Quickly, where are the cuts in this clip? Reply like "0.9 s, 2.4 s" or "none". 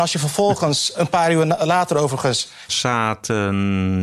0.9 s, 2.7 s

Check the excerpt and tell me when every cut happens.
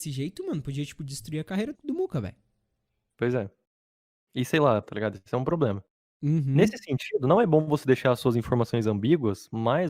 1.7 s, 4.8 s

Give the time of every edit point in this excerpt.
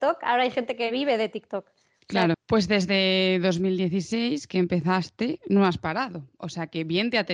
2.3 s

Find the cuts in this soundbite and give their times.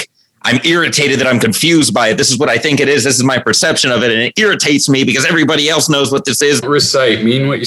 6.6 s

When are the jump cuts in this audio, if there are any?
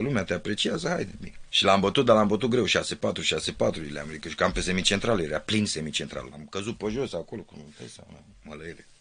1.5 s, 6.3 s

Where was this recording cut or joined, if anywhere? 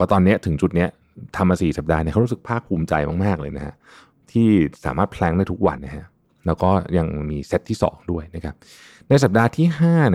5.8 s

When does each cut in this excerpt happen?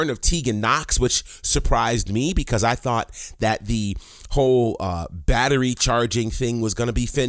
none

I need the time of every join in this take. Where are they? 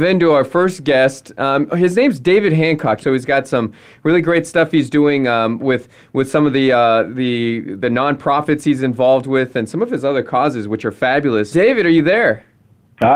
3.0 s, 11.5 s

